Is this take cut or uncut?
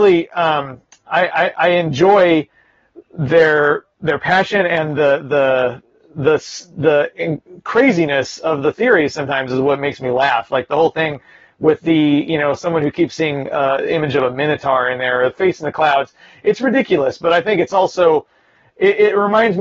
uncut